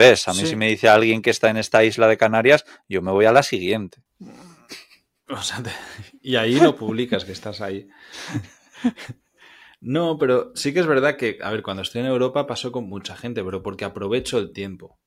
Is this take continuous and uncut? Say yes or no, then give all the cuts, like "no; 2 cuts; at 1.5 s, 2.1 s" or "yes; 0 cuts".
yes; 0 cuts